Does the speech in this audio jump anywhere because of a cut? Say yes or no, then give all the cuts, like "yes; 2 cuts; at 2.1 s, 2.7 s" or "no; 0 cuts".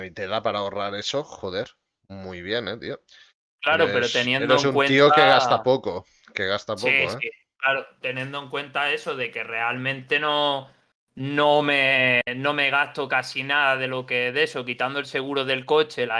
no; 0 cuts